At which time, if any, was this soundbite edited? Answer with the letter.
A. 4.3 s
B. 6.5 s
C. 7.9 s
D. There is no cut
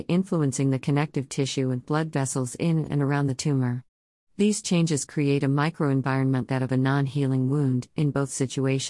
B